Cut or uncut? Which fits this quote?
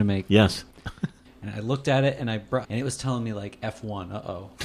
cut